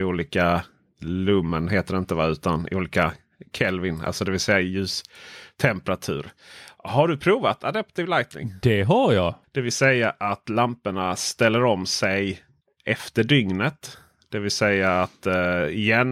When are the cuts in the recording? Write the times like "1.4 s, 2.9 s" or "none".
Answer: 9.4 s